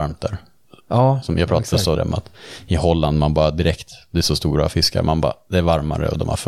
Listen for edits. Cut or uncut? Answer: cut